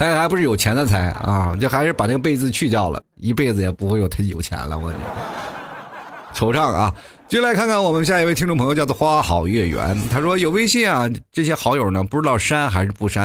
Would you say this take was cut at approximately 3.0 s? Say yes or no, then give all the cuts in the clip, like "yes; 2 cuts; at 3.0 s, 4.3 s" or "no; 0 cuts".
yes; 1 cut; at 3.0 s